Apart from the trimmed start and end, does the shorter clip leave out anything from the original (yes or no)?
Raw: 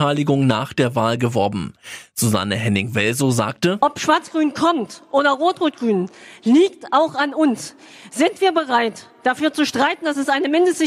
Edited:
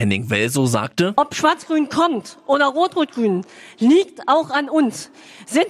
no